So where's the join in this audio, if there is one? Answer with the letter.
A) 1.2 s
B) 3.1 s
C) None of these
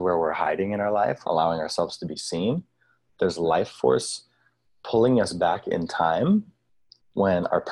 A